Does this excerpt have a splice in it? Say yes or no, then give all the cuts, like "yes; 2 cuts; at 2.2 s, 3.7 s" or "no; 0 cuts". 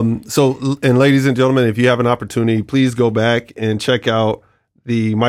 no; 0 cuts